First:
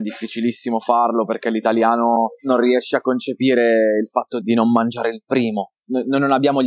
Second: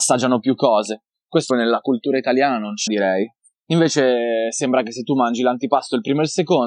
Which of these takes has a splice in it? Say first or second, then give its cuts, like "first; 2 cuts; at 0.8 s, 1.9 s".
second; 2 cuts; at 1.5 s, 2.9 s